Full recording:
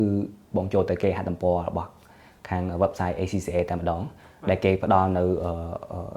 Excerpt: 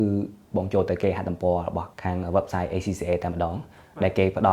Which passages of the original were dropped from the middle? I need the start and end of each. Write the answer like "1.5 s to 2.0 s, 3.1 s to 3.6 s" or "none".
1.9 s to 2.4 s